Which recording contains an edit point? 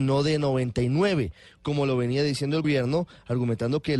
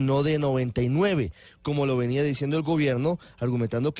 first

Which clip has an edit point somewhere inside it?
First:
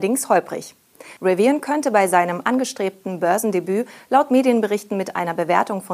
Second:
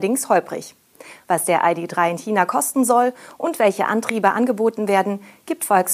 first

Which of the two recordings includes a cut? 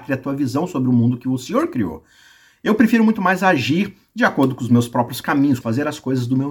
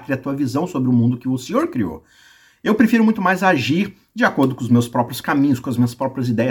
first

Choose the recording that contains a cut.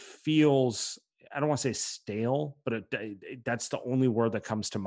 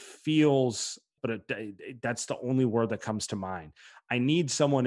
second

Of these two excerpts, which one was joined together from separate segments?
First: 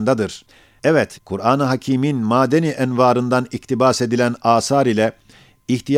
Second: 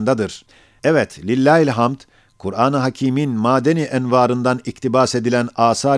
first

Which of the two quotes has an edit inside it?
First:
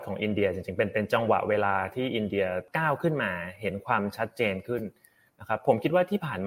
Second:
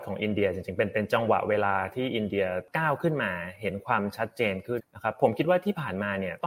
second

